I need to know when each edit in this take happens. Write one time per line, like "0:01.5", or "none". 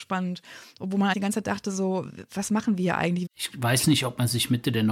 0:01.1
0:03.3